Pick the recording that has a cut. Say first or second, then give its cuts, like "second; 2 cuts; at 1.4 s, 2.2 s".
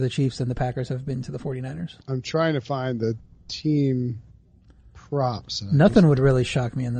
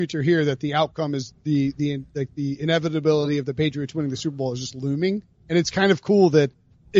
first; 1 cut; at 2.0 s